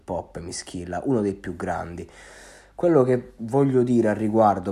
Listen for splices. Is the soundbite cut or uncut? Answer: uncut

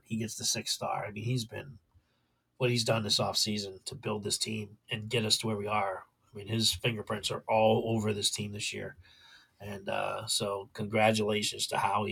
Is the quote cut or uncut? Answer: cut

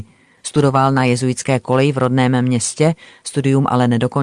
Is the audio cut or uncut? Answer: uncut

